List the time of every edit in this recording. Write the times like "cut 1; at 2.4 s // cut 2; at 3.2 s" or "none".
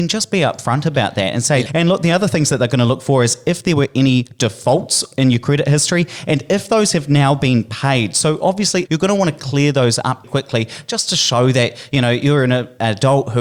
cut 1; at 1.7 s // cut 2; at 8.9 s // cut 3; at 10.2 s